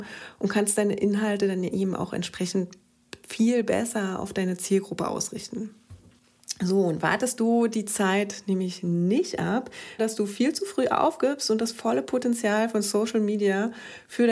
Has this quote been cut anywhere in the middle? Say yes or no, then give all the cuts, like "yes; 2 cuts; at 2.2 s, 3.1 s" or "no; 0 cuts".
yes; 1 cut; at 10.0 s